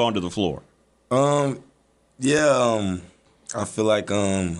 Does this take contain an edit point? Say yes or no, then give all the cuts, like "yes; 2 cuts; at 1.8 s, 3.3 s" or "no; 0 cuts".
no; 0 cuts